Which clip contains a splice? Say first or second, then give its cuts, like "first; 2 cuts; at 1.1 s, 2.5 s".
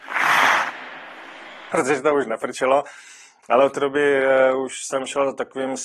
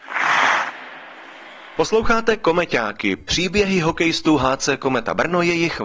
first; 1 cut; at 1.7 s